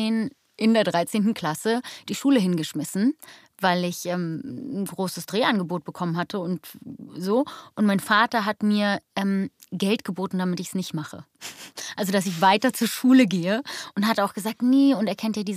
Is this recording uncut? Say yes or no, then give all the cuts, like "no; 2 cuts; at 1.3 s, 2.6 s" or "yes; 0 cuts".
yes; 0 cuts